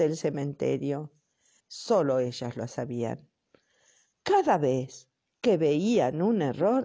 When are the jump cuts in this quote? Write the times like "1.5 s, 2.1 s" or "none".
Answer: 1.6 s, 4.1 s